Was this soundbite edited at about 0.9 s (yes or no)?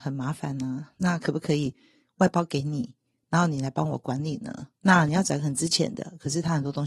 no